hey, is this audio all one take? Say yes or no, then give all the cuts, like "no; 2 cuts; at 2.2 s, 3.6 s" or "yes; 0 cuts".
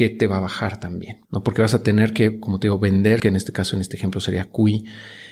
no; 2 cuts; at 1.3 s, 3.2 s